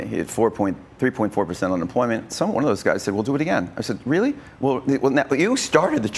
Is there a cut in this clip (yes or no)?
yes